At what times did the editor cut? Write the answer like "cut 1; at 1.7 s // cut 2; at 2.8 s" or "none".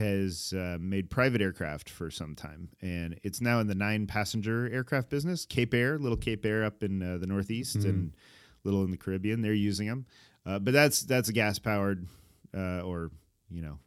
none